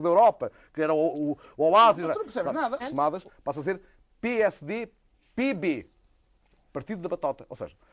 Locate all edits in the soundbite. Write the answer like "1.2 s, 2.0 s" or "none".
2.8 s